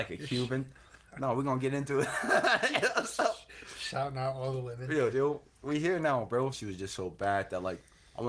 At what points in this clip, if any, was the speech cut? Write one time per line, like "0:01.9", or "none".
0:05.1
0:06.5